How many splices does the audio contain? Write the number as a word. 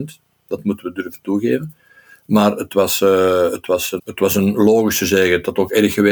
one